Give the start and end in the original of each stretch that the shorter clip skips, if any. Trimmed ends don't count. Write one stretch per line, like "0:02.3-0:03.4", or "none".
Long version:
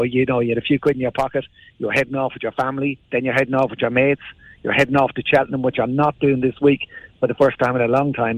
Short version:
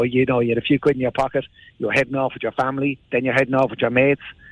none